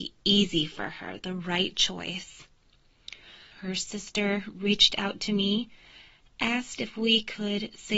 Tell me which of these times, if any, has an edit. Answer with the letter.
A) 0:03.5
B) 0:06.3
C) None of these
A